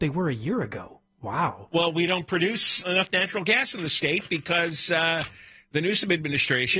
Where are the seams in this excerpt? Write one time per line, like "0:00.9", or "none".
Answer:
0:02.8